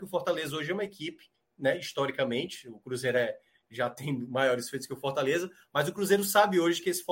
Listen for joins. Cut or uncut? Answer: uncut